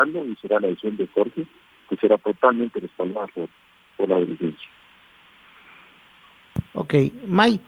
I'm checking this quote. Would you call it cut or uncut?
uncut